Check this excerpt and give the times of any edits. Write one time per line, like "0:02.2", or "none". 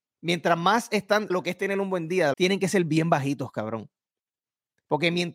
0:01.3
0:02.3